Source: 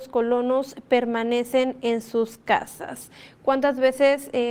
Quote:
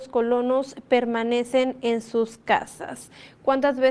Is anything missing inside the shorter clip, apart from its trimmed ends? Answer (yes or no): no